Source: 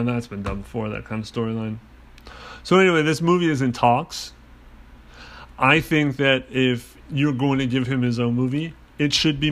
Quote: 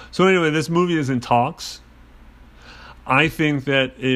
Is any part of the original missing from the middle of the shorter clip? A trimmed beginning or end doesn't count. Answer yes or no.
no